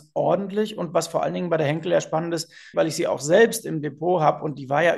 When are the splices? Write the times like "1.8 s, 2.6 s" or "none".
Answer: 2.7 s